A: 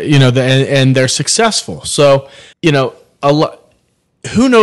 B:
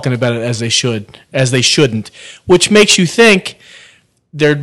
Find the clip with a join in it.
A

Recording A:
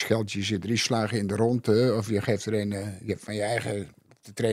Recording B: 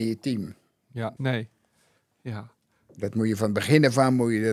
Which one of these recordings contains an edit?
B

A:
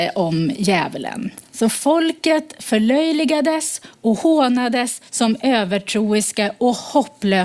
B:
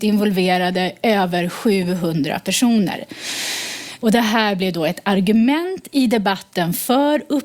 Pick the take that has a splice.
B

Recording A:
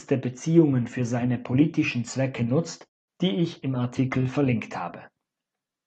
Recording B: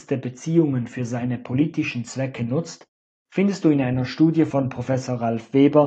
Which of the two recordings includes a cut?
A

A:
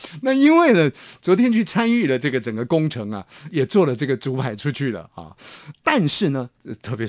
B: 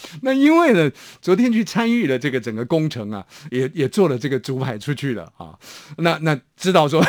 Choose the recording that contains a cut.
A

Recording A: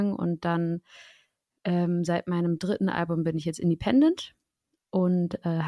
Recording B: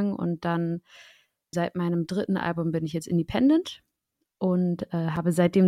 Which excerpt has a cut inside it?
B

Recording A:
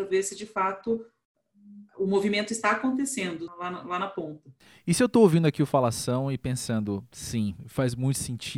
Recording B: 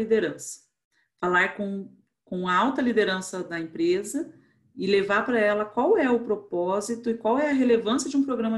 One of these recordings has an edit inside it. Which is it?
A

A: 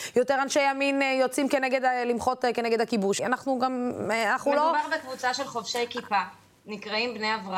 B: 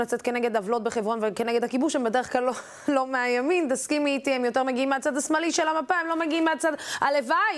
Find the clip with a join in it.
A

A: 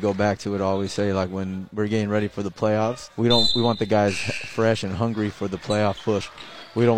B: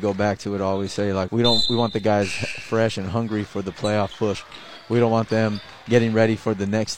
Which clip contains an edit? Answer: B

